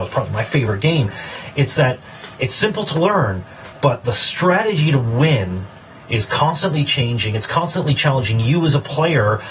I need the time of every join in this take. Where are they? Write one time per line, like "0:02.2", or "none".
none